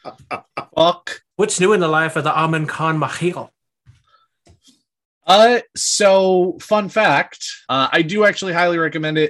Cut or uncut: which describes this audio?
cut